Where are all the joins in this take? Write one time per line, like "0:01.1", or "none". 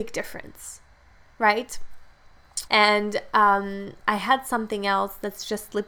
0:02.7